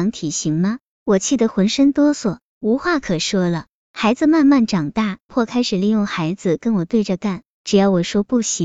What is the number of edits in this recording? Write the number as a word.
one